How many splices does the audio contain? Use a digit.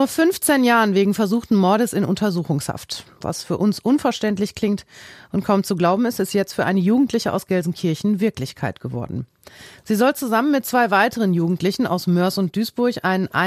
0